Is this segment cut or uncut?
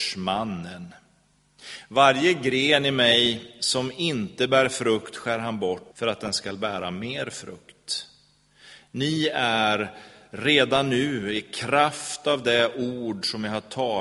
cut